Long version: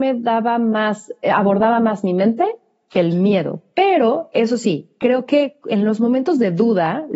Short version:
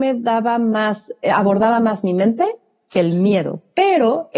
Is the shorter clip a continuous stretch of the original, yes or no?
yes